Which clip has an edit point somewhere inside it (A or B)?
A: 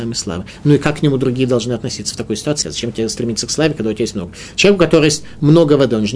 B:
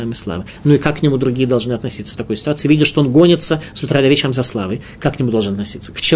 A